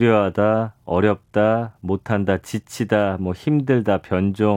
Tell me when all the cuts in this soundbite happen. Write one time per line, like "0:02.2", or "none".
none